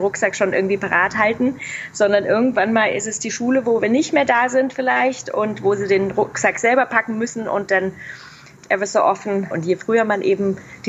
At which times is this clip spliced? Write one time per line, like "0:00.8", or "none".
0:09.5